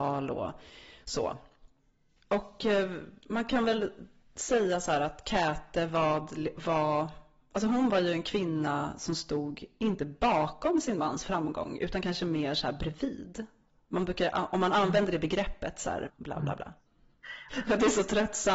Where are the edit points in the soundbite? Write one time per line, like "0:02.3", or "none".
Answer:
0:16.1
0:17.5